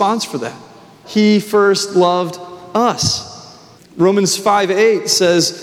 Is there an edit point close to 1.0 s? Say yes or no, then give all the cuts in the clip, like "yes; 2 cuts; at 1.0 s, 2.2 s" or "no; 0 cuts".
yes; 2 cuts; at 1.0 s, 3.8 s